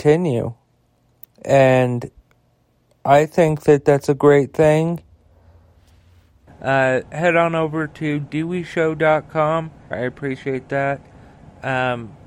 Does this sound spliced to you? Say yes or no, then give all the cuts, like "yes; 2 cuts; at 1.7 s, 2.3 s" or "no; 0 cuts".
yes; 2 cuts; at 6.5 s, 9.9 s